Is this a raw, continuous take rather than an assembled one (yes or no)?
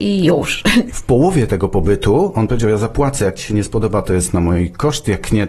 no